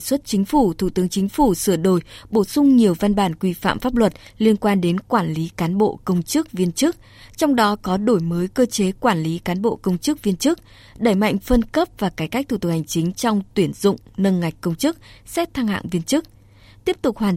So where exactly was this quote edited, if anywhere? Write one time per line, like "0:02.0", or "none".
none